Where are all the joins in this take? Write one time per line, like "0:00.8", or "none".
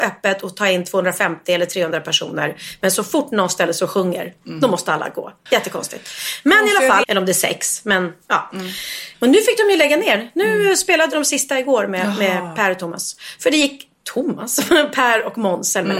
0:05.5
0:07.0
0:09.1